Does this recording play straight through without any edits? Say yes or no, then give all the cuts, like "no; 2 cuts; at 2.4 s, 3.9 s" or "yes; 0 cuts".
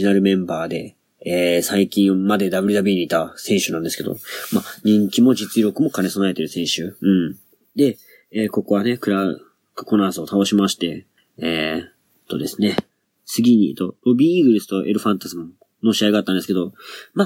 yes; 0 cuts